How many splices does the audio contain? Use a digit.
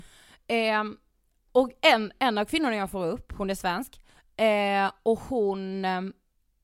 0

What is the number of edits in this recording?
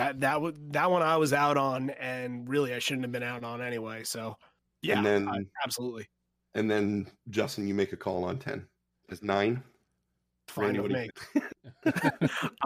2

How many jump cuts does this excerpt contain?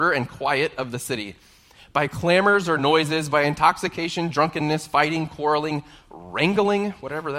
0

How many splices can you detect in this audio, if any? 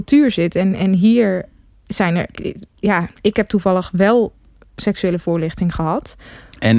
1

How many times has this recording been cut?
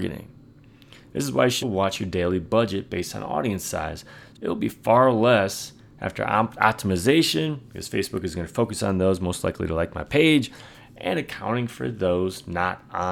2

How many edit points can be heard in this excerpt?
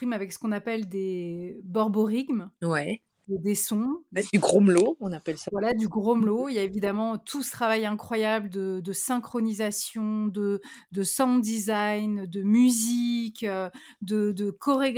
0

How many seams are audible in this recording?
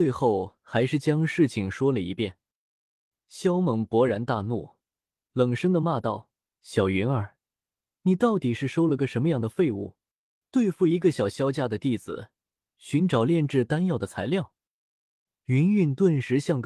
2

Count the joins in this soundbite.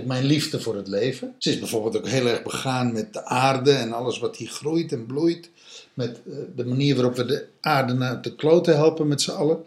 1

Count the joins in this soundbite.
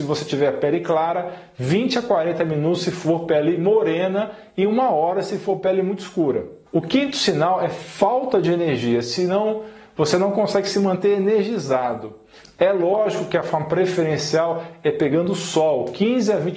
2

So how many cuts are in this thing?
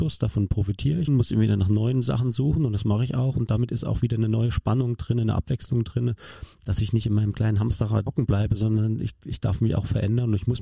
2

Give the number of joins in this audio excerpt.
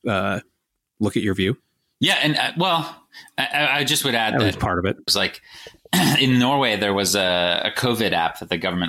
1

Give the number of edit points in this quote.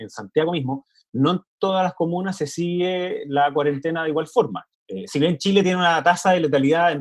1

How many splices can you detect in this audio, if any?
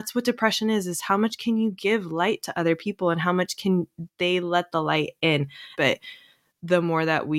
1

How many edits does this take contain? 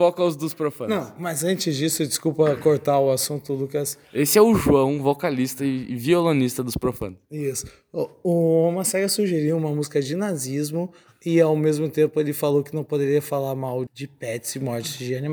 1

